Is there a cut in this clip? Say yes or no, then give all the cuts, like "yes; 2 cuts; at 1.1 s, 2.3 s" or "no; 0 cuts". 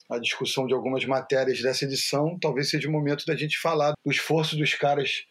yes; 1 cut; at 3.9 s